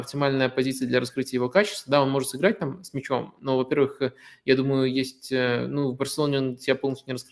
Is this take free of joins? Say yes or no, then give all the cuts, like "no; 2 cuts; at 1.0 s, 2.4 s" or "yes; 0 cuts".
yes; 0 cuts